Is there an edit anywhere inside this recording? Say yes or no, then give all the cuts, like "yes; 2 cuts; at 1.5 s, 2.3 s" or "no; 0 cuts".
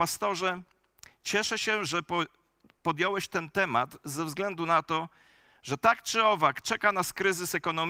no; 0 cuts